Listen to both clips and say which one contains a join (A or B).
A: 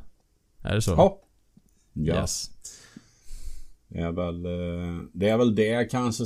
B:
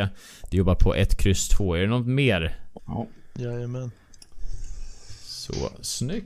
B